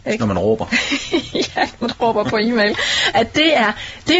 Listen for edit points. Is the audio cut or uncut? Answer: uncut